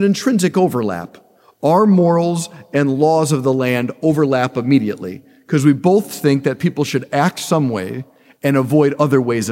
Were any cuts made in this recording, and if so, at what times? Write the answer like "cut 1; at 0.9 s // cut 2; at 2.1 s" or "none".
none